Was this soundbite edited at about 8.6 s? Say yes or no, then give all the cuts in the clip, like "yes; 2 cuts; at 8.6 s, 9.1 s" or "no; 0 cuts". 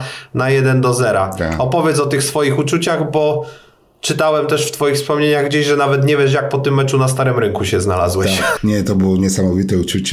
yes; 1 cut; at 8.6 s